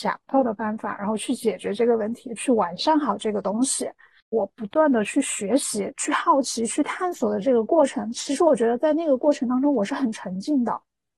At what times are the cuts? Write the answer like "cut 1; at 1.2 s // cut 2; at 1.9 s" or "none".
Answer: cut 1; at 4.2 s